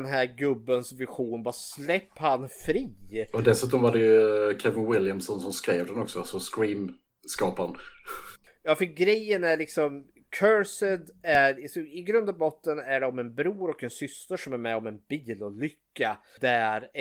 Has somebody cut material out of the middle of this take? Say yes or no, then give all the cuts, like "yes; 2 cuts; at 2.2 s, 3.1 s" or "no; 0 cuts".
no; 0 cuts